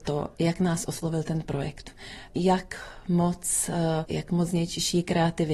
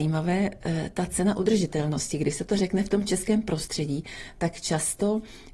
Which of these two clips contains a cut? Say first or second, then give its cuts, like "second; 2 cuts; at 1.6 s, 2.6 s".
first; 1 cut; at 4.1 s